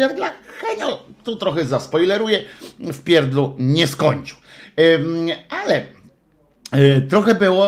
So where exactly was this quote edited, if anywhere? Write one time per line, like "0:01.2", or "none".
none